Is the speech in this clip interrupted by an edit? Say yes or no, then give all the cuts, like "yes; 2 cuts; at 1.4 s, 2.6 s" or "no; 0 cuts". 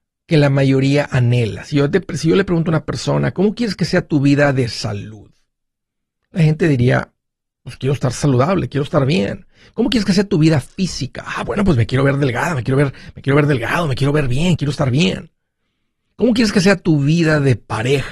yes; 1 cut; at 14.6 s